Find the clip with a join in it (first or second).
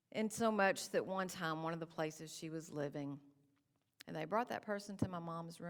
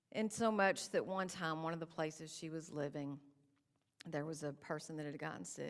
first